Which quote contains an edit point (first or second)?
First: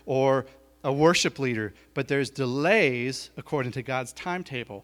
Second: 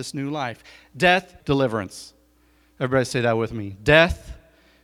second